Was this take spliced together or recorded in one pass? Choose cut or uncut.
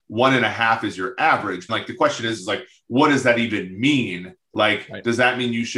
cut